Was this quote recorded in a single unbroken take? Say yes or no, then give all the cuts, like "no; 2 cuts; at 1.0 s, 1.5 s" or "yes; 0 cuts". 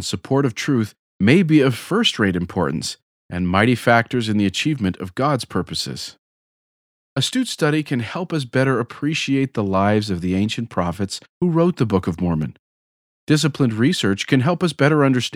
yes; 0 cuts